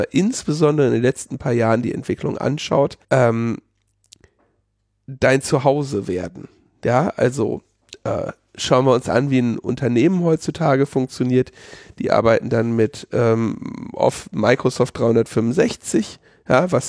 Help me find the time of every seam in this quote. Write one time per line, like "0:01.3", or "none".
0:03.0